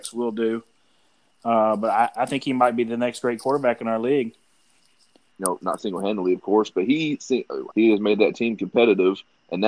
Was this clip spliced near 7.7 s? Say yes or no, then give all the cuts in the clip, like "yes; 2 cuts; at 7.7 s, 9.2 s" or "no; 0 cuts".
yes; 3 cuts; at 2.1 s, 5.3 s, 7.7 s